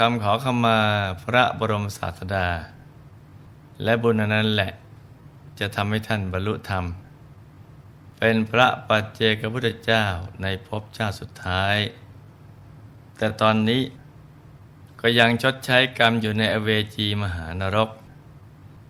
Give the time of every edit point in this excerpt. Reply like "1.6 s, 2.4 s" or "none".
none